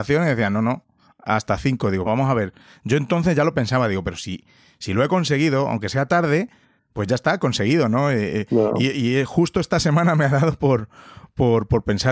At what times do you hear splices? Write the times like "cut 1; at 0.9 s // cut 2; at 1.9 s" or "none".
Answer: cut 1; at 2.1 s